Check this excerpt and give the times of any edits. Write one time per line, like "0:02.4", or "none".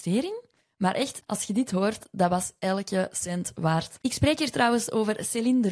0:01.2